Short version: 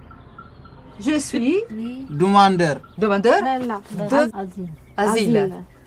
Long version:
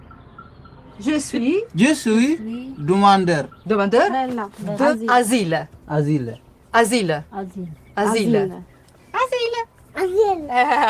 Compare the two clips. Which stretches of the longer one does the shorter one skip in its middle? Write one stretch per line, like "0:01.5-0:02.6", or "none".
0:01.7-0:02.4
0:05.0-0:07.3